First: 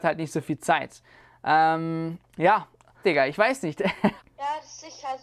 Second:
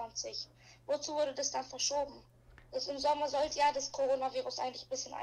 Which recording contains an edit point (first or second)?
first